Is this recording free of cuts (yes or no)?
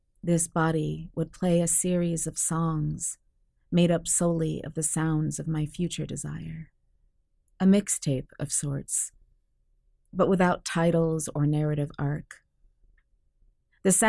yes